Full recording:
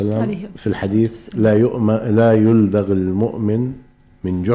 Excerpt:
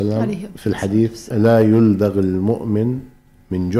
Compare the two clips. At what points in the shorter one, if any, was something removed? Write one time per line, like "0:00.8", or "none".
0:01.3